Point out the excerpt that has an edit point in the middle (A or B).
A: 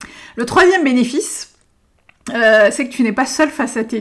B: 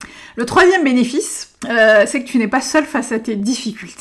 B